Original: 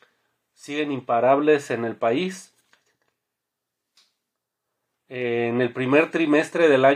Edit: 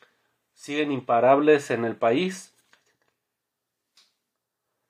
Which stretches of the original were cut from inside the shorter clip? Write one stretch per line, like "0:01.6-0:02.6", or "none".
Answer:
none